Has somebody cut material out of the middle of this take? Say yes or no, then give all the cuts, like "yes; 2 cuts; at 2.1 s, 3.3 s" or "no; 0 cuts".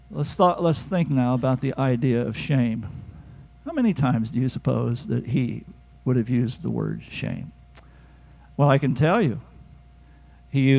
yes; 1 cut; at 3.5 s